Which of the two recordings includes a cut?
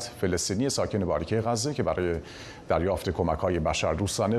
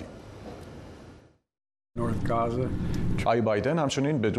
second; 1 cut; at 3.2 s

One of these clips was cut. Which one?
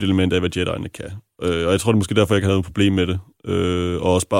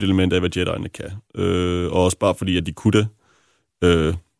second; 2 cuts; at 1.3 s, 2.6 s

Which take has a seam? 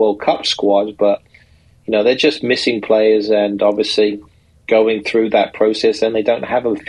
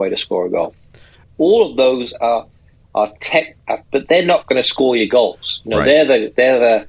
second; 2 cuts; at 1.2 s, 3.8 s

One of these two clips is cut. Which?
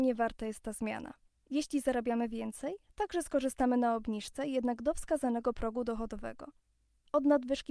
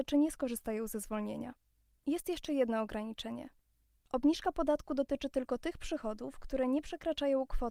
first; 1 cut; at 1.4 s

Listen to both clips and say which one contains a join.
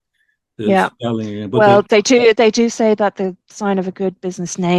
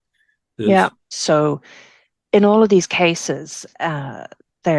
second; 1 cut; at 1.0 s

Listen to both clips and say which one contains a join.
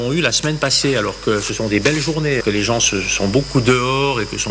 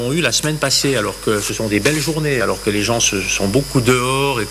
first; 1 cut; at 2.4 s

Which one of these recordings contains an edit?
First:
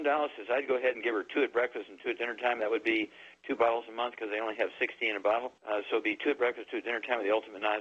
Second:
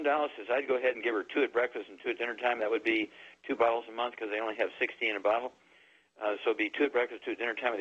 first; 1 cut; at 5.6 s

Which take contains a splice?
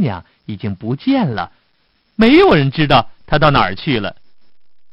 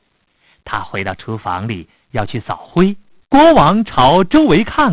second; 1 cut; at 3.2 s

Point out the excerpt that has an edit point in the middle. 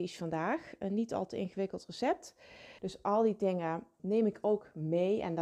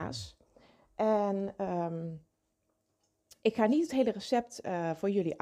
first; 2 cuts; at 2.8 s, 4.0 s

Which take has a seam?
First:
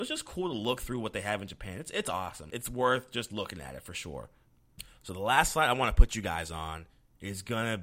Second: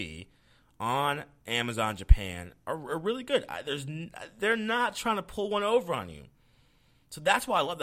first; 1 cut; at 2.5 s

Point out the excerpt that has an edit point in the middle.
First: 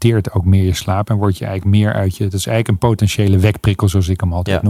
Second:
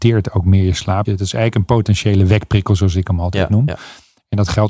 second; 1 cut; at 1.1 s

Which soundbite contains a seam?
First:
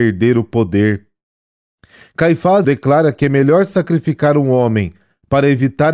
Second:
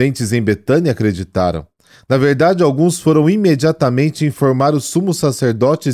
first; 1 cut; at 2.6 s

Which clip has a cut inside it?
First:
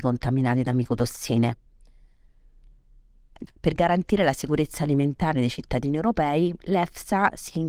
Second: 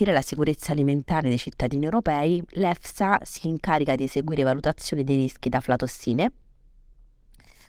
first; 1 cut; at 3.5 s

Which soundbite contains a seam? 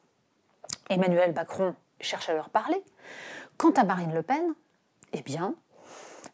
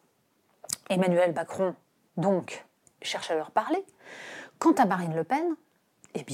first; 1 cut; at 1.9 s

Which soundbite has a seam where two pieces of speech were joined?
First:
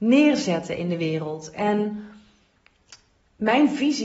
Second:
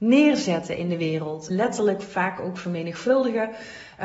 second; 1 cut; at 1.5 s

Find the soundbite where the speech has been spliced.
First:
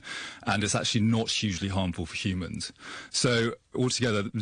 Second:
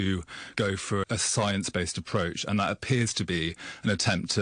second; 1 cut; at 1.0 s

